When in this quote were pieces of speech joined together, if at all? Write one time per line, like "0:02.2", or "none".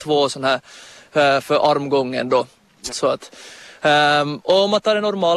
0:02.9

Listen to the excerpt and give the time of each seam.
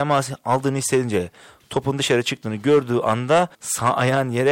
0:03.5

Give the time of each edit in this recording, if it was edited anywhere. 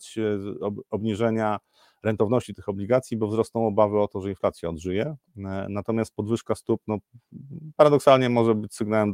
none

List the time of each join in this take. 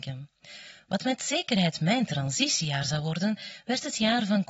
none

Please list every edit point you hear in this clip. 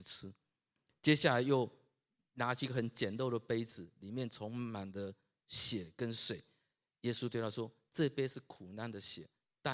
none

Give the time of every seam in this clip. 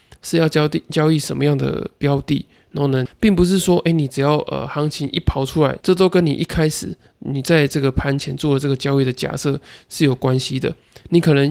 0:03.1
0:05.8

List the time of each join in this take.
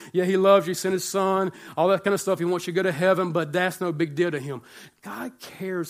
none

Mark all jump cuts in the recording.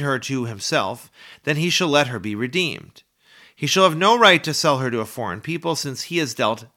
none

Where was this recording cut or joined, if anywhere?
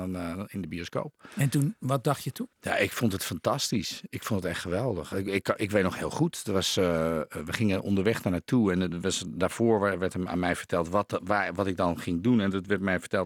0:02.5

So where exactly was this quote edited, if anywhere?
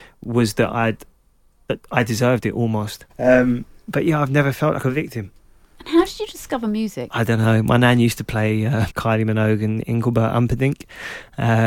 0:03.1
0:08.9

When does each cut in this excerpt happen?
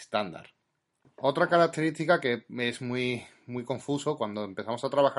0:01.0

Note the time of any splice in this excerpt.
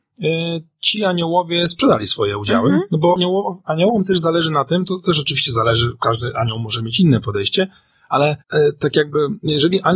0:03.2
0:08.4

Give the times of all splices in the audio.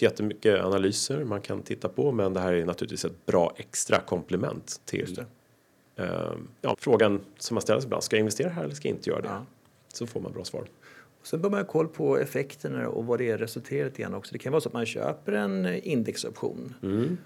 0:06.7

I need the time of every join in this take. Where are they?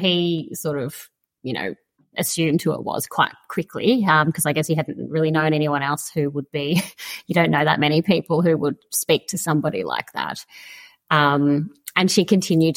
none

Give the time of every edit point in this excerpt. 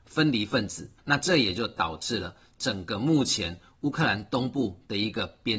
0:01.0

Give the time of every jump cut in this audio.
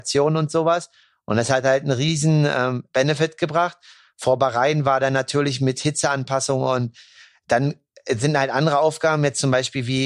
none

